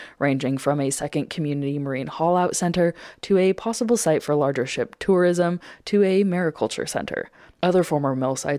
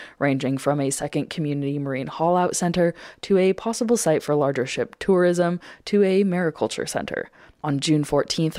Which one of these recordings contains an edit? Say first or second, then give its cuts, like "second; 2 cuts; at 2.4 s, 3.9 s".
second; 1 cut; at 7.6 s